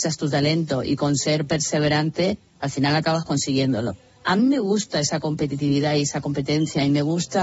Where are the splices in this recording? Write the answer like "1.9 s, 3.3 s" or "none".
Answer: none